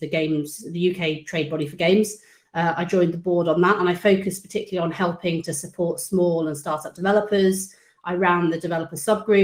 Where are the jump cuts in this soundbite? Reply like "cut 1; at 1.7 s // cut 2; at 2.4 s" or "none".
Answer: none